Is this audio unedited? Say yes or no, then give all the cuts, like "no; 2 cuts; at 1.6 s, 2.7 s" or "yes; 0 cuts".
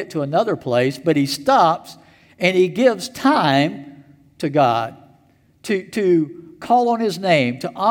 yes; 0 cuts